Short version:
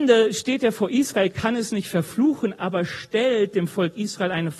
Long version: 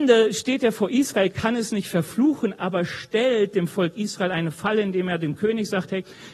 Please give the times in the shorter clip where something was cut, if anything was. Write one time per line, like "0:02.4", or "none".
none